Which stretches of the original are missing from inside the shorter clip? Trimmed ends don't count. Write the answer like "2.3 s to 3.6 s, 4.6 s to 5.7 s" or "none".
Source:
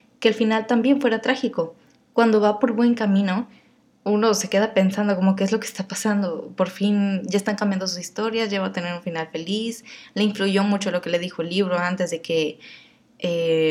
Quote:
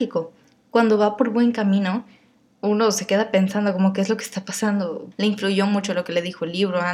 6.5 s to 10.1 s